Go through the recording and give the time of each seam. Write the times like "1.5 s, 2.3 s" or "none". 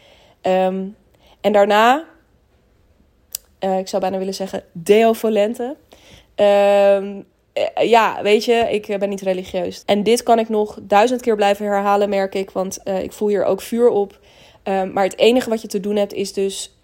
9.8 s